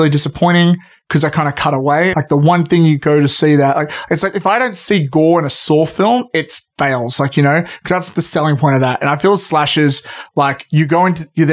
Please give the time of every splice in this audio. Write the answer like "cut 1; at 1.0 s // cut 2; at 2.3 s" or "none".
cut 1; at 2.1 s